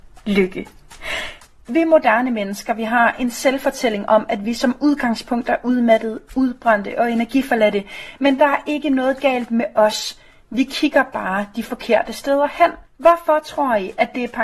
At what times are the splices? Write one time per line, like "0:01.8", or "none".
0:12.9